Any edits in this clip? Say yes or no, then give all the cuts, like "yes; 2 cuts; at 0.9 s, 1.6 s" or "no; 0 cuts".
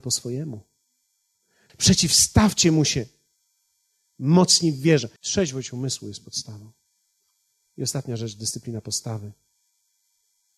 yes; 2 cuts; at 1.7 s, 5.2 s